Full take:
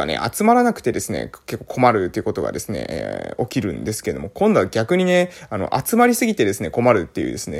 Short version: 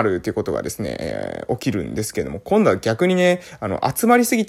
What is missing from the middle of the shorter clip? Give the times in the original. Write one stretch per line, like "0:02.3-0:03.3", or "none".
none